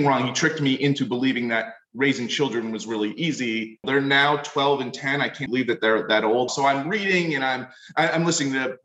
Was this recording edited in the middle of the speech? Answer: yes; 3 cuts; at 3.8 s, 5.5 s, 6.5 s

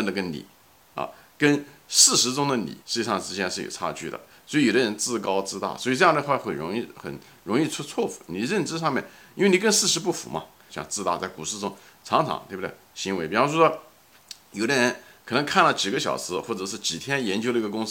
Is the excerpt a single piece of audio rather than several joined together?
no; 2 cuts; at 2.8 s, 10.7 s

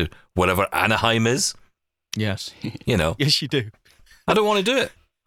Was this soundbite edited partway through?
no; 0 cuts

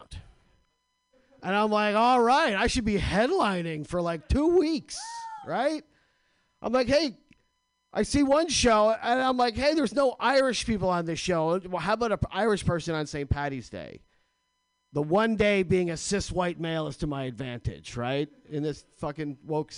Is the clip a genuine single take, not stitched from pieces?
yes; 0 cuts

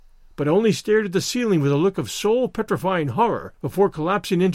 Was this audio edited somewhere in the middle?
no; 0 cuts

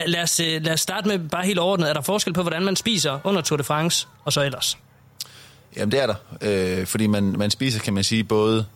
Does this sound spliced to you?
no; 0 cuts

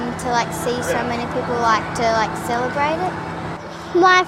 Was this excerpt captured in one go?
yes; 0 cuts

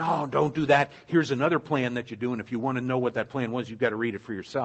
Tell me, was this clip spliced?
no; 0 cuts

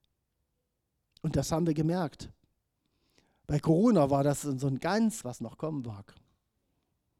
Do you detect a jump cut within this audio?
yes; 1 cut; at 5.2 s

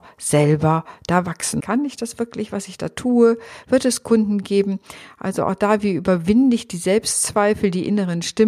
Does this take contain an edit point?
yes; 1 cut; at 1.6 s

